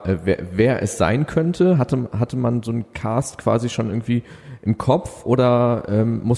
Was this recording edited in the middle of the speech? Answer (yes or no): no